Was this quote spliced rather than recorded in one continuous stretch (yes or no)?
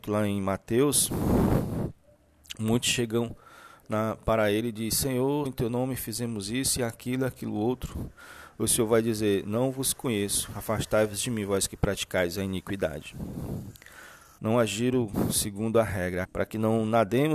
yes